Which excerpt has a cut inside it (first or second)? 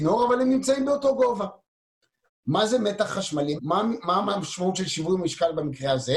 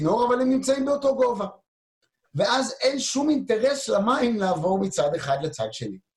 first